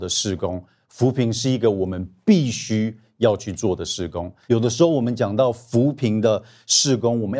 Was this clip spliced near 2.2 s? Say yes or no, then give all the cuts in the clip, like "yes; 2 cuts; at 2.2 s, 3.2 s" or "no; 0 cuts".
no; 1 cut; at 4.5 s